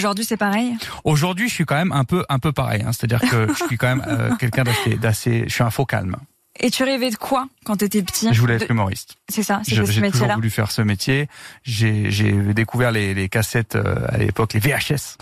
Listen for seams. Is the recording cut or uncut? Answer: uncut